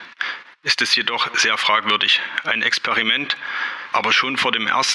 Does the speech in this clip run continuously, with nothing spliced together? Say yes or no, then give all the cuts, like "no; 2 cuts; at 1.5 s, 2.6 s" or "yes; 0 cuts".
no; 1 cut; at 3.9 s